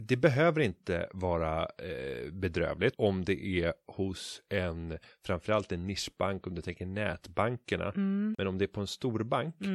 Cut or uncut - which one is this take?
cut